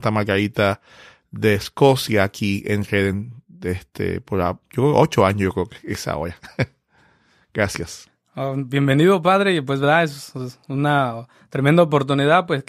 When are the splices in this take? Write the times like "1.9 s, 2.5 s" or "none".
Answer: none